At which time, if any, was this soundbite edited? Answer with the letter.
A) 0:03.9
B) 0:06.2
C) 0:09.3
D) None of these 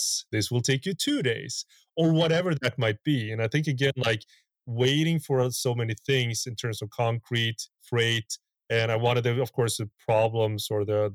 D